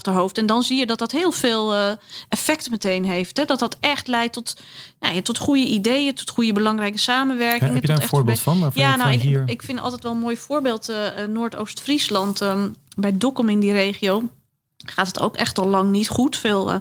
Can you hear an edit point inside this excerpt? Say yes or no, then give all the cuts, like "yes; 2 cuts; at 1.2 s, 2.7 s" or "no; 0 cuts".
yes; 1 cut; at 6.1 s